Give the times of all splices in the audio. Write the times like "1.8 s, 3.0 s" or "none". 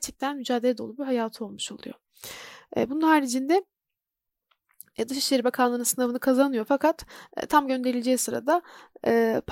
none